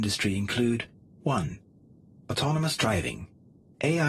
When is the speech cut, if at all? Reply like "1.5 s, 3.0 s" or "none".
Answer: none